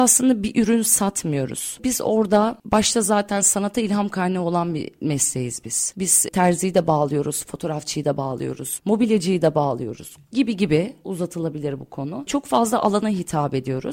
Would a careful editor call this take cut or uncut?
uncut